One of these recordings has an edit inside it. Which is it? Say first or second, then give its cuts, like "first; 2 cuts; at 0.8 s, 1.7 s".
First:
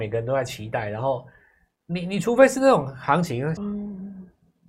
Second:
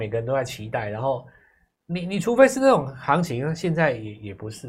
first; 1 cut; at 3.6 s